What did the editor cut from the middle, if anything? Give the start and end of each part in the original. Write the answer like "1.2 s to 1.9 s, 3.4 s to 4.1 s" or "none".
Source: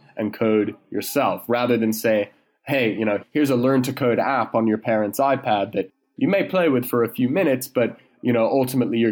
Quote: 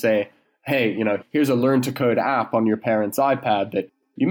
none